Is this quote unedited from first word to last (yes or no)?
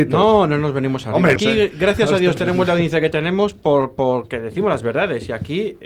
no